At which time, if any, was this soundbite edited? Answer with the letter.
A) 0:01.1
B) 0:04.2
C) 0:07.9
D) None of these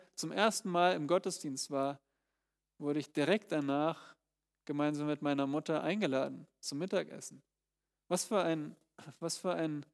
D